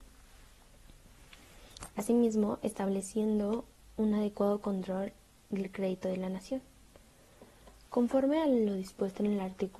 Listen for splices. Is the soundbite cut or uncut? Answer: uncut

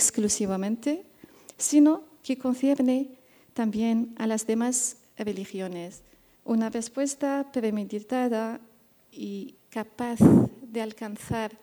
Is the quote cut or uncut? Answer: cut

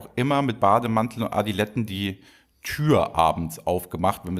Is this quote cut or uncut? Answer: uncut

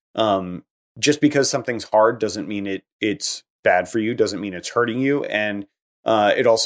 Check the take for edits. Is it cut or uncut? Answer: uncut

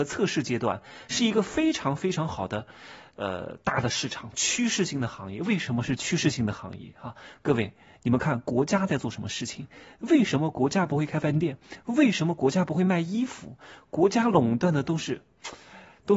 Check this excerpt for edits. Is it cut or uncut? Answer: uncut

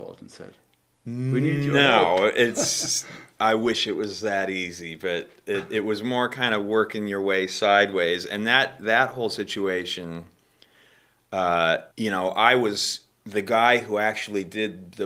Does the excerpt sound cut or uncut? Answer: cut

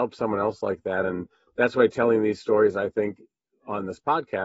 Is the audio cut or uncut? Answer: uncut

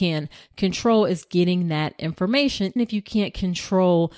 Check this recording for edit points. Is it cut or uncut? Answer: cut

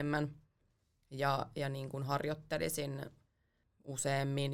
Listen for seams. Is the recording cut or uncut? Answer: uncut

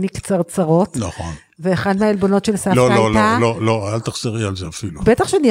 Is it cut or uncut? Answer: uncut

